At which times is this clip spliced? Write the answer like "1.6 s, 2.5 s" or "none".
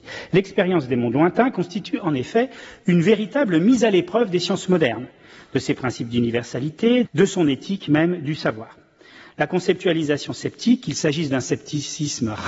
7.0 s